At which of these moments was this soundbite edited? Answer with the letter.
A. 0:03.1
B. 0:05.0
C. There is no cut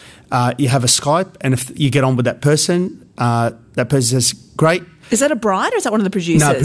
B